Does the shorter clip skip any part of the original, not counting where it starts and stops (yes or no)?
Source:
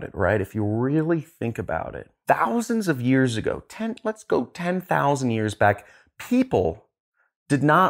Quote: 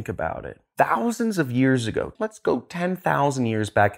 yes